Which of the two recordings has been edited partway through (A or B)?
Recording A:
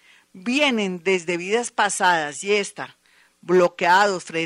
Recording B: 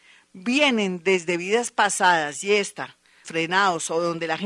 B